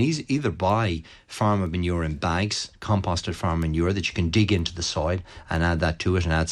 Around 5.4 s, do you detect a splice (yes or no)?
no